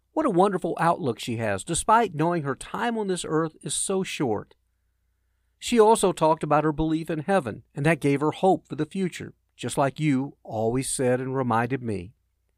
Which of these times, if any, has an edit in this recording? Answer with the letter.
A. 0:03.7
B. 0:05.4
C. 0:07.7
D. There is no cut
C